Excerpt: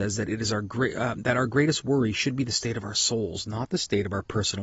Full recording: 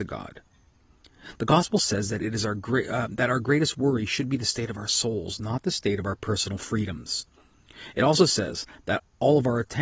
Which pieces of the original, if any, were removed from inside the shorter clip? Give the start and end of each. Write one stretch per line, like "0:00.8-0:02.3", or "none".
none